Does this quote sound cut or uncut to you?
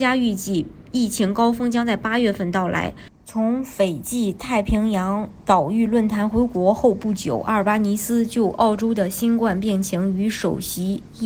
uncut